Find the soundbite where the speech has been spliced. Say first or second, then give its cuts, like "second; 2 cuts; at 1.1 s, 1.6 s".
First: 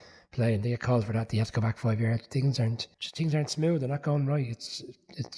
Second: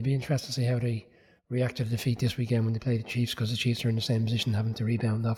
first; 1 cut; at 2.9 s